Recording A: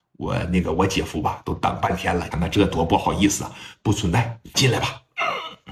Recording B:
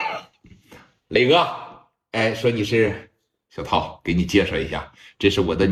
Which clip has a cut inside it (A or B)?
A